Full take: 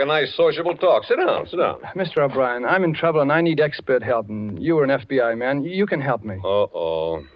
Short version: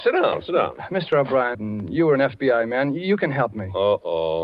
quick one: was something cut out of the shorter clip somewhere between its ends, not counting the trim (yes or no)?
yes